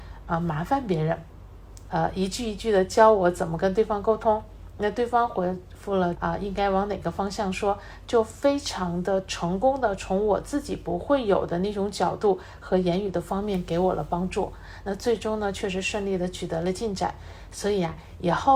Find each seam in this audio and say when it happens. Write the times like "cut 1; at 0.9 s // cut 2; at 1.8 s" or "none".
cut 1; at 1.9 s // cut 2; at 6.2 s